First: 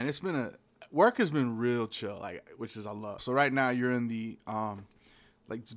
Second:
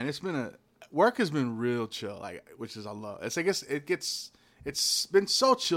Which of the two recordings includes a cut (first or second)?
first